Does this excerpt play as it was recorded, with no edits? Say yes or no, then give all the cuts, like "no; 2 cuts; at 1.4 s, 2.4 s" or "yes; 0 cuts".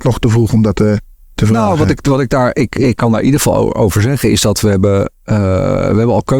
yes; 0 cuts